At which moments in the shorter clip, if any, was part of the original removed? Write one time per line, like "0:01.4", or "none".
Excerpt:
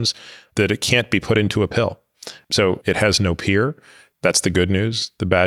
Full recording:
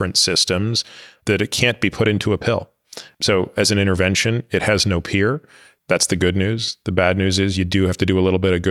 0:02.8